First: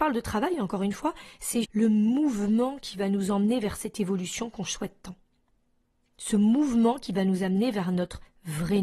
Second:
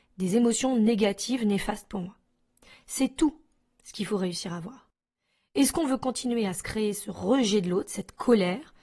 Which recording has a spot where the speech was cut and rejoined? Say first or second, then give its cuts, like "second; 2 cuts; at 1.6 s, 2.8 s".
first; 1 cut; at 1.6 s